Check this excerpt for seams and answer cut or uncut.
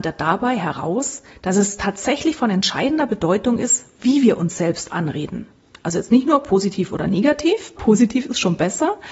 cut